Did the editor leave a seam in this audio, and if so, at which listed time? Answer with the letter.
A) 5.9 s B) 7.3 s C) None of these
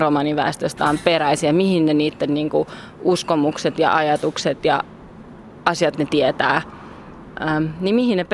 A